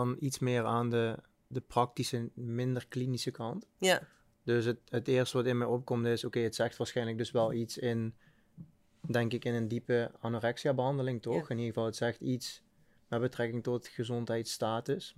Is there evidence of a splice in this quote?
yes; 1 cut; at 1.5 s

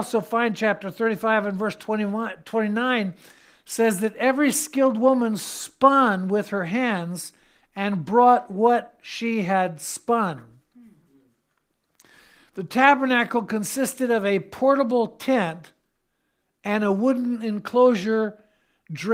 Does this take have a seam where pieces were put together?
no; 0 cuts

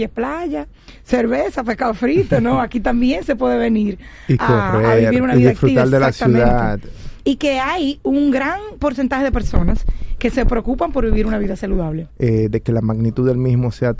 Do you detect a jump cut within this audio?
yes; 1 cut; at 12.1 s

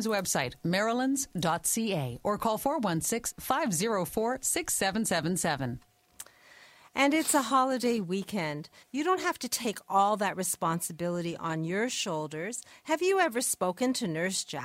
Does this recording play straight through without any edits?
no; 1 cut; at 8.8 s

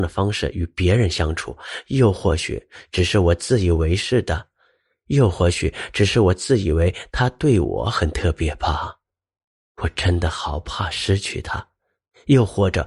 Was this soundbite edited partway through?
no; 0 cuts

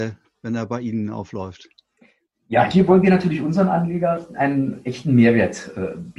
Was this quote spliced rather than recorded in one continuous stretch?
no; 0 cuts

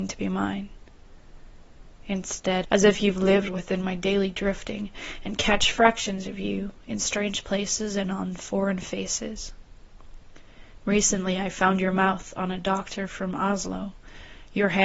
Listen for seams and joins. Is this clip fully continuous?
no; 1 cut; at 2.6 s

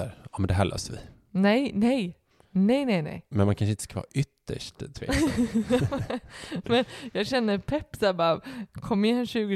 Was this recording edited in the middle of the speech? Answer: no; 0 cuts

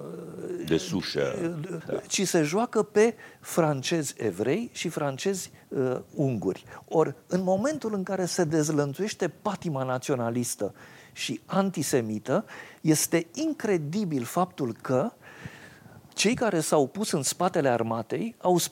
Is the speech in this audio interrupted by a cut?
yes; 1 cut; at 1.8 s

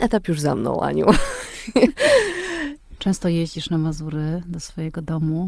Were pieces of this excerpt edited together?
yes; 1 cut; at 3.0 s

